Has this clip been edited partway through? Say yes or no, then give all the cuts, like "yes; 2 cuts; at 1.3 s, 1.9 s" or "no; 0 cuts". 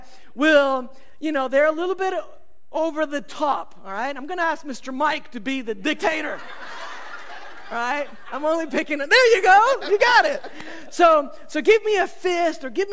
no; 0 cuts